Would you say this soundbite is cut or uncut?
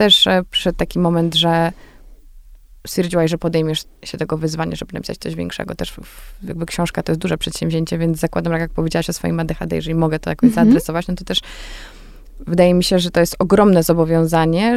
uncut